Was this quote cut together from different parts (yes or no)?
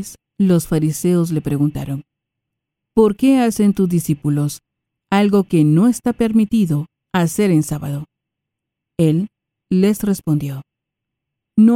no